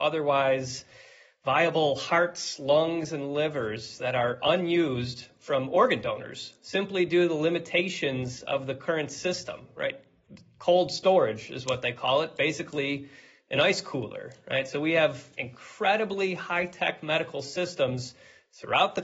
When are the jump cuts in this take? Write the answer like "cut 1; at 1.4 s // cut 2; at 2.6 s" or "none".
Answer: none